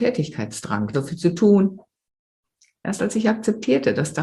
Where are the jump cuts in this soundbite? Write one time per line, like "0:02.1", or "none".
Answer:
0:00.9